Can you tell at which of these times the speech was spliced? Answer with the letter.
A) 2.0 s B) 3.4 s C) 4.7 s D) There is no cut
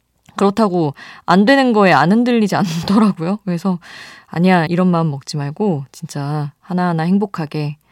C